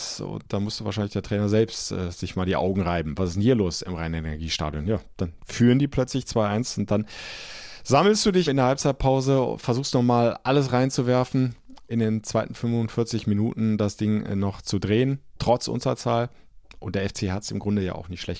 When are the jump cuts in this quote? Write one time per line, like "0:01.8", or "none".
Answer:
0:08.5
0:11.9